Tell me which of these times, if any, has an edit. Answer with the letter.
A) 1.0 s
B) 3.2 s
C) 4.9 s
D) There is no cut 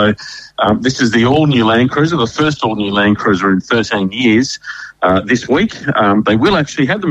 C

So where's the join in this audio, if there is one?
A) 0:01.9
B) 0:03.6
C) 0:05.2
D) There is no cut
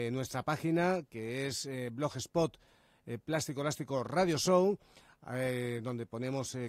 D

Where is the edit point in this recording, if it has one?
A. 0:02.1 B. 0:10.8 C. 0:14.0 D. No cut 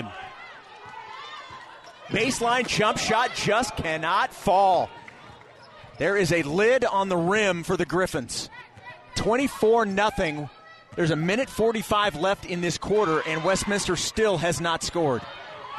A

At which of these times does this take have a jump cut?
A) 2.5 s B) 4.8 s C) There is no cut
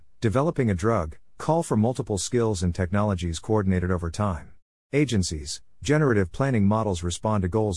B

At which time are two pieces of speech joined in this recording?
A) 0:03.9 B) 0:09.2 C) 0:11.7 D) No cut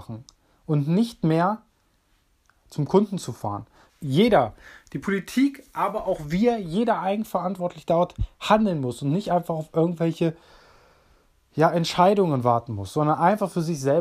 A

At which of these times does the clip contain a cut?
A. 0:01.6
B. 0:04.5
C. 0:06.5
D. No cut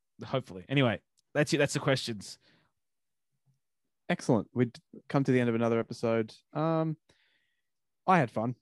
B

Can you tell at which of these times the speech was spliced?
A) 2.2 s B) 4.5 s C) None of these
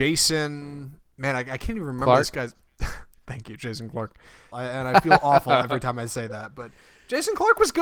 B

